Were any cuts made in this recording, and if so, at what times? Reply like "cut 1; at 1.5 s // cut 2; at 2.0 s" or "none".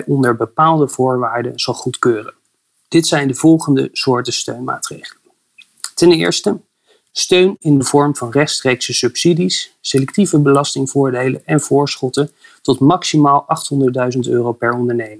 none